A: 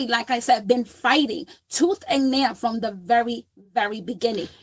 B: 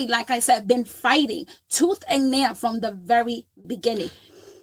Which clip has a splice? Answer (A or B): B